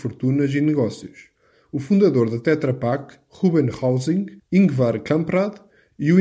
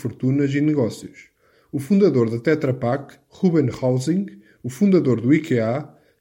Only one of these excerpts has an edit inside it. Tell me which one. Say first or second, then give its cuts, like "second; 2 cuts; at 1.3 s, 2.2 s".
first; 1 cut; at 4.4 s